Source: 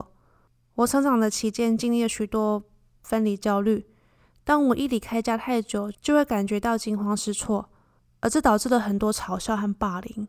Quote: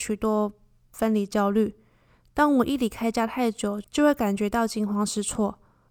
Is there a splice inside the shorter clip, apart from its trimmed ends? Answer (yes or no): no